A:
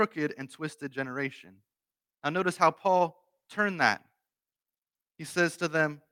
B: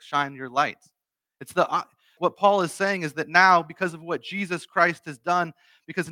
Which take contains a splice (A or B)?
B